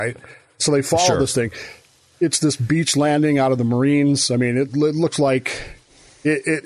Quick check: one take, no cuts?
yes; 0 cuts

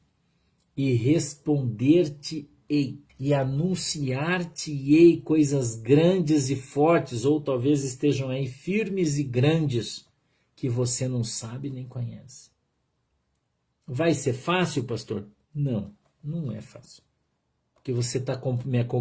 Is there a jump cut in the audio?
yes; 1 cut; at 3.1 s

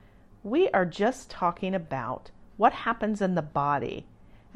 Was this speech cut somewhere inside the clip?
no; 0 cuts

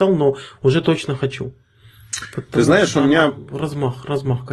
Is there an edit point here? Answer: no; 0 cuts

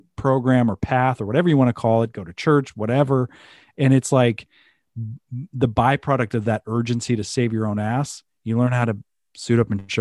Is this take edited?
no; 0 cuts

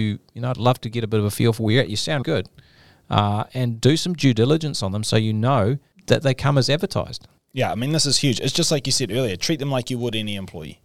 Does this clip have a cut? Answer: yes; 1 cut; at 2.2 s

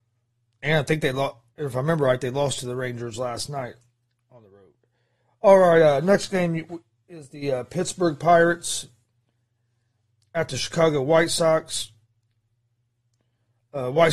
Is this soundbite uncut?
yes; 0 cuts

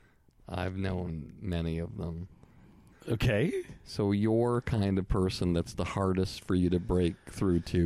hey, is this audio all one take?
no; 1 cut; at 2.9 s

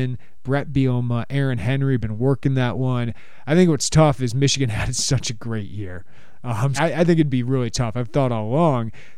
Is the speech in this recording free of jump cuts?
no; 1 cut; at 6.8 s

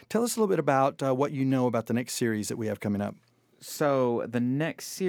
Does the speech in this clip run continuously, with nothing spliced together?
yes; 0 cuts

